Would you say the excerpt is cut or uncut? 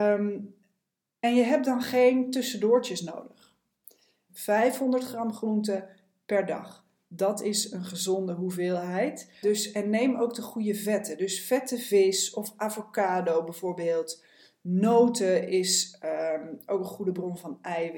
cut